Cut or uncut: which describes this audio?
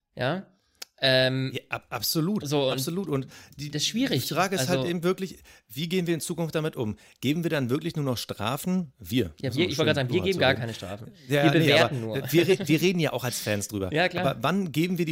uncut